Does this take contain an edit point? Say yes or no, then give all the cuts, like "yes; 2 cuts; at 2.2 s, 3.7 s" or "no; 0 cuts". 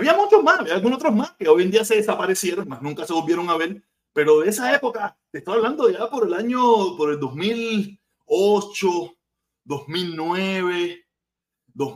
yes; 1 cut; at 2.6 s